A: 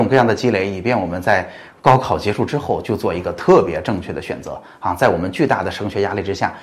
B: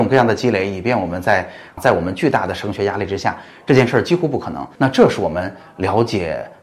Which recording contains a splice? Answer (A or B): B